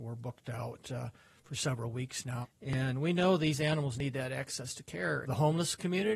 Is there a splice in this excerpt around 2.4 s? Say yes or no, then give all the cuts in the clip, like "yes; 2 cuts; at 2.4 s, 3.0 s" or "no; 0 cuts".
yes; 2 cuts; at 2.4 s, 5.2 s